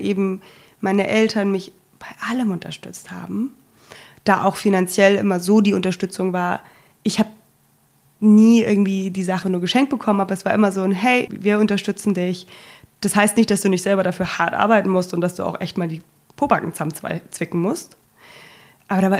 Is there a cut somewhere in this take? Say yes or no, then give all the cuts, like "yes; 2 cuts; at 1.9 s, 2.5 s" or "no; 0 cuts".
yes; 2 cuts; at 9.4 s, 11.3 s